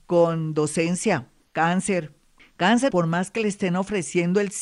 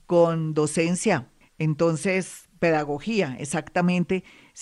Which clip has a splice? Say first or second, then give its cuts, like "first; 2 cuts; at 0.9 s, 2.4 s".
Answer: first; 2 cuts; at 1.4 s, 2.9 s